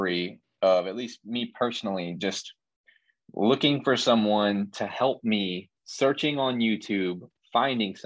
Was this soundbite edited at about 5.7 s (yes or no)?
yes